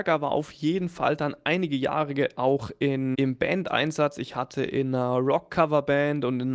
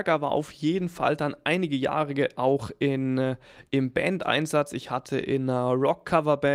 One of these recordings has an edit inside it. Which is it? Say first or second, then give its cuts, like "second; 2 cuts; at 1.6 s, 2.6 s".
first; 1 cut; at 3.1 s